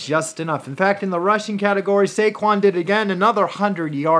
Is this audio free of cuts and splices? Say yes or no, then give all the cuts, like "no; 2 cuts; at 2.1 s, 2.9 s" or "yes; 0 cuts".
yes; 0 cuts